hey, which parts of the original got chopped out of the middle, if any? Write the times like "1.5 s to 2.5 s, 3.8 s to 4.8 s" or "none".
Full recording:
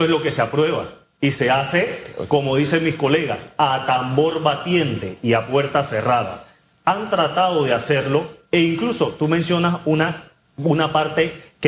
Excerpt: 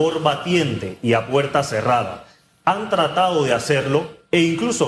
none